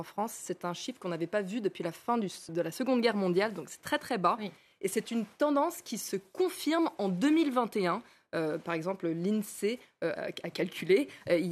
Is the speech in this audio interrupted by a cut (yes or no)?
yes